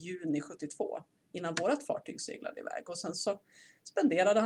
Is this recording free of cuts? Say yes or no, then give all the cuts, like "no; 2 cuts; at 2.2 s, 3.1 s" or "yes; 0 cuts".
no; 1 cut; at 1.1 s